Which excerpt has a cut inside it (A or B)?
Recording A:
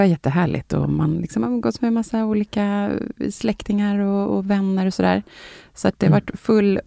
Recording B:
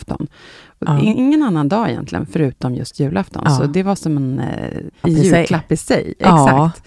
B